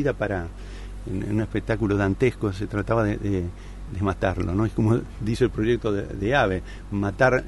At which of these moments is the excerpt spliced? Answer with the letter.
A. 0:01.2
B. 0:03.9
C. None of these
B